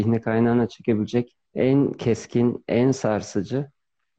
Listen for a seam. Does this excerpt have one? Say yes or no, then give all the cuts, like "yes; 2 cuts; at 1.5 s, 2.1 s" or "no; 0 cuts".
yes; 1 cut; at 1.5 s